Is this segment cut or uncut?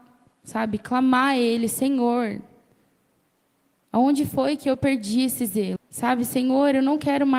cut